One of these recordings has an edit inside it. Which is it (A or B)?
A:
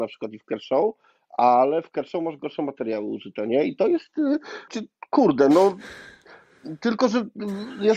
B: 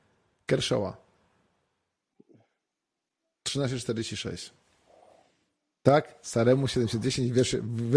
A